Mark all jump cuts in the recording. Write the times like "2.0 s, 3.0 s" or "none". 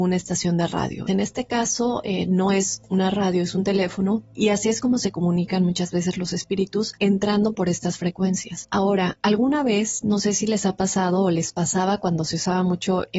1.1 s

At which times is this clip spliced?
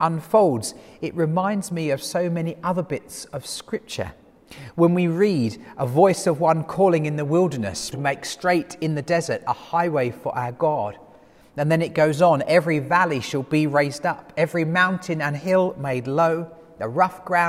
7.9 s

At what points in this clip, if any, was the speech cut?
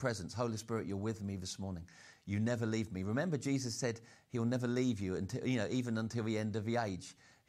none

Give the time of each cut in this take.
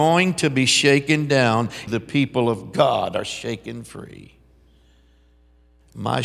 1.9 s

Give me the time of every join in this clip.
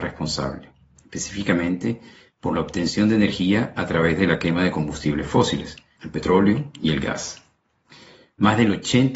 6.0 s

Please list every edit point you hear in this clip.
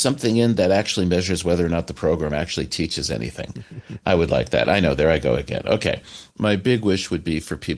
4.0 s, 6.3 s

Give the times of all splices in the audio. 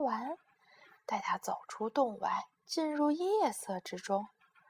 0.9 s, 2.5 s

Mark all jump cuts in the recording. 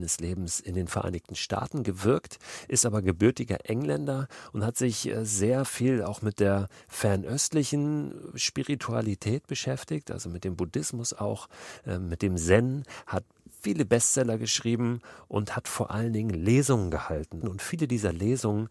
17.4 s

